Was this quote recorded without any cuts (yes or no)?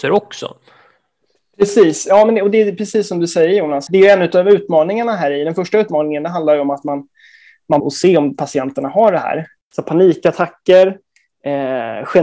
no